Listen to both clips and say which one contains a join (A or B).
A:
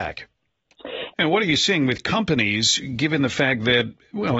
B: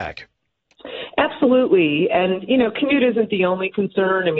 A